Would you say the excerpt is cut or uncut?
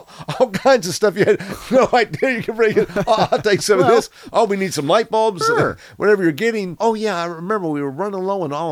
cut